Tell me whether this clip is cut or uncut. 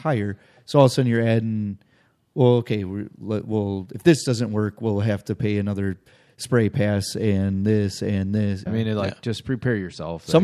cut